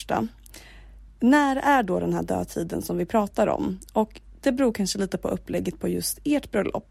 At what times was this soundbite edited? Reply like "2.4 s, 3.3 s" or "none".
none